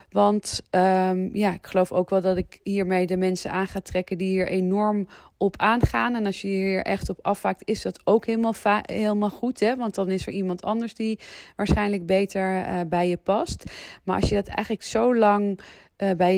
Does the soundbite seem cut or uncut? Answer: uncut